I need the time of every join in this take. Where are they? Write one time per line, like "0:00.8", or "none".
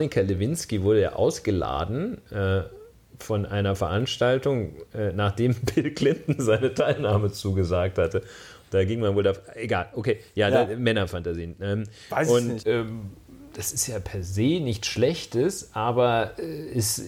0:12.6